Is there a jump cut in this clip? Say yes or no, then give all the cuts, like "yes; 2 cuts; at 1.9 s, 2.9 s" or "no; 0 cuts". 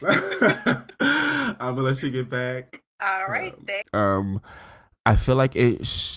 yes; 1 cut; at 3.8 s